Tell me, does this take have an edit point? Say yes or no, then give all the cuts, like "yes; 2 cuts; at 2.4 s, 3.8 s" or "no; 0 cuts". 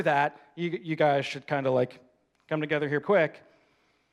yes; 1 cut; at 3.0 s